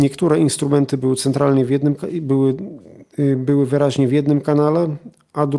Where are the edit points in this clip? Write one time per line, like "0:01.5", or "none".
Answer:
none